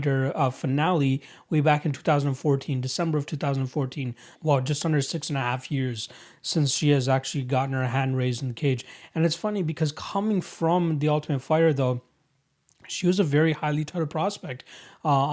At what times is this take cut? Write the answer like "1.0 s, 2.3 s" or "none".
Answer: 4.3 s